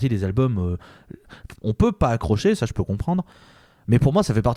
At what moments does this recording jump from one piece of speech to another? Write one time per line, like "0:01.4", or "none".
0:01.6